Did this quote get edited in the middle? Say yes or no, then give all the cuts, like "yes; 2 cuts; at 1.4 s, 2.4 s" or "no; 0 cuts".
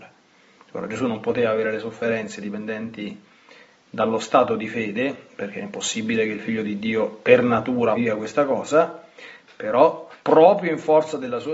yes; 2 cuts; at 7.9 s, 10.2 s